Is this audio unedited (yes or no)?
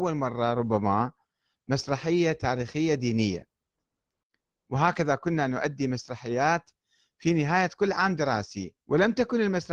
no